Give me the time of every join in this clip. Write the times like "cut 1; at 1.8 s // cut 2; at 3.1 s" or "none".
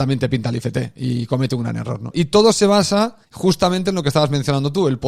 cut 1; at 2.1 s // cut 2; at 3.2 s